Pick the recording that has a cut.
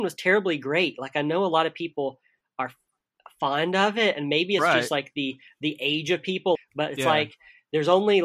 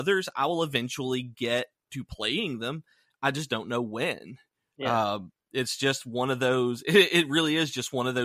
first; 1 cut; at 6.5 s

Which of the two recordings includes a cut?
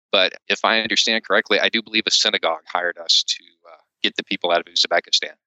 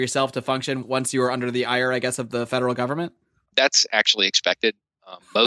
second; 1 cut; at 3.5 s

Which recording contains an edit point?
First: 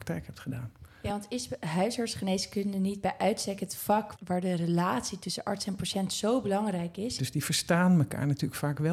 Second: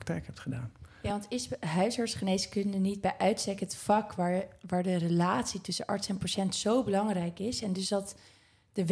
first; 2 cuts; at 4.1 s, 7.2 s

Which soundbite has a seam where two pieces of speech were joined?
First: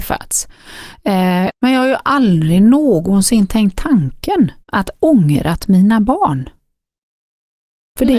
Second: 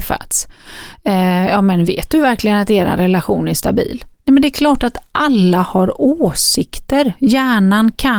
first; 2 cuts; at 1.5 s, 4.6 s

